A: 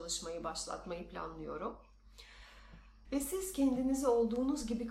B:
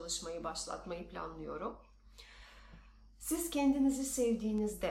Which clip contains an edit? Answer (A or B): A